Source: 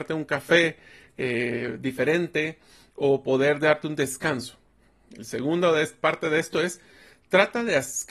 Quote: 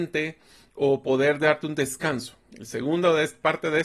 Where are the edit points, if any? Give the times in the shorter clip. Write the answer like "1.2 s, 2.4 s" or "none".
2.4 s